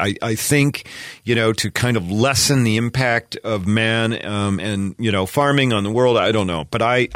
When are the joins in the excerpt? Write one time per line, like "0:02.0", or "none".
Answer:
none